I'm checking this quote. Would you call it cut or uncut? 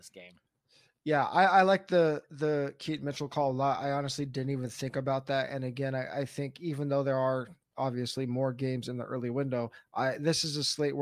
uncut